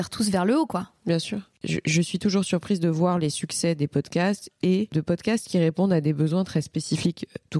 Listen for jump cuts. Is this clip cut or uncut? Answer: uncut